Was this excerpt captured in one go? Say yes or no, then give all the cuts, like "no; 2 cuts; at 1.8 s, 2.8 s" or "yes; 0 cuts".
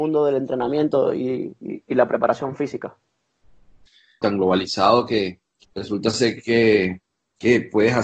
no; 2 cuts; at 4.2 s, 5.6 s